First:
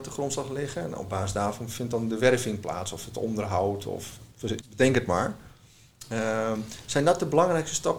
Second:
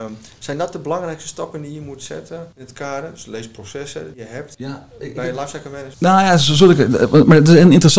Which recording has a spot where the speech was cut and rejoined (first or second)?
first